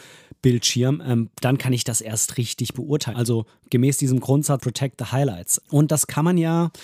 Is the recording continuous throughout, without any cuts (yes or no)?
no